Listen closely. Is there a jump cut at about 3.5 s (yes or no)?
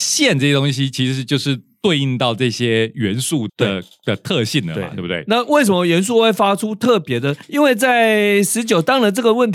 yes